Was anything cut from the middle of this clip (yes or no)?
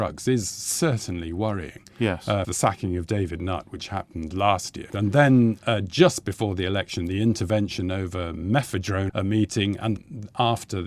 yes